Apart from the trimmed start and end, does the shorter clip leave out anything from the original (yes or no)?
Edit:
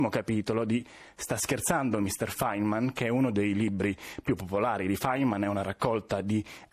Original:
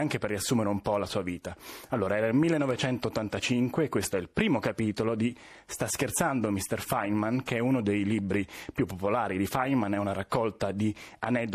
no